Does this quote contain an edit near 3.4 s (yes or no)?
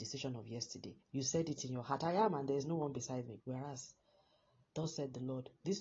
yes